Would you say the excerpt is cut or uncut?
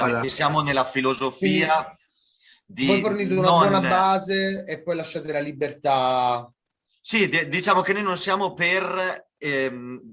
uncut